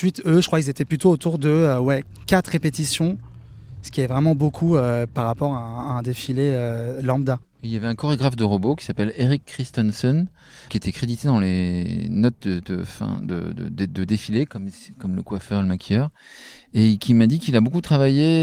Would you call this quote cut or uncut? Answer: cut